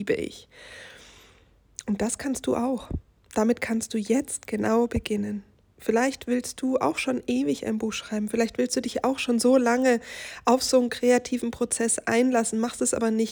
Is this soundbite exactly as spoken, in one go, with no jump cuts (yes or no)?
yes